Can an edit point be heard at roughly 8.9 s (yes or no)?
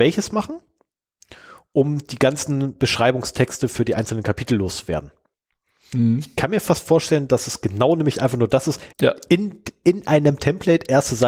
yes